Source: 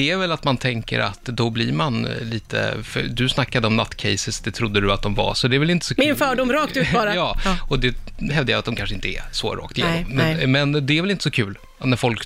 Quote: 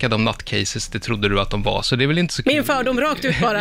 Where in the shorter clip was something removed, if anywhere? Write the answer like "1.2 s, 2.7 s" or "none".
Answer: none